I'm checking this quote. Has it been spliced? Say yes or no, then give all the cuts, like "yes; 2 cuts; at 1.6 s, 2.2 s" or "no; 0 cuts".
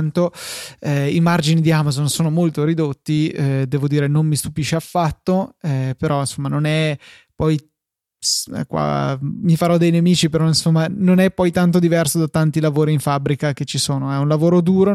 no; 0 cuts